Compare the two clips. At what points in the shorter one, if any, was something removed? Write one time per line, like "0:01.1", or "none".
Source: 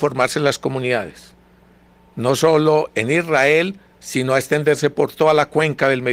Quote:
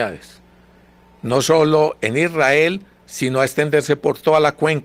none